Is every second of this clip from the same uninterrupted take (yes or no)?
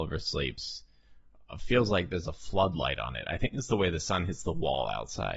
yes